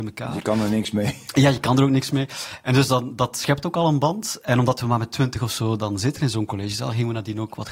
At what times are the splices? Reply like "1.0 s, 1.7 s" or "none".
none

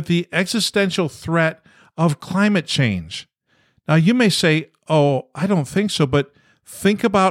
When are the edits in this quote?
none

